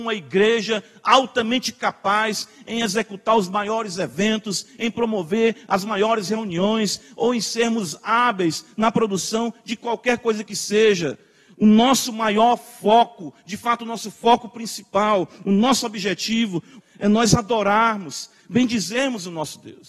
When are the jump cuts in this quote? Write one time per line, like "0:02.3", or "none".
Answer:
0:16.8